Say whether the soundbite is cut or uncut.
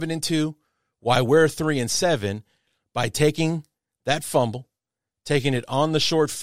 uncut